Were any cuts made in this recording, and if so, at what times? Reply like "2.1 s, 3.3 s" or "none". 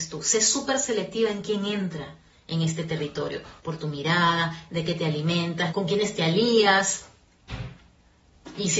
3.6 s, 5.7 s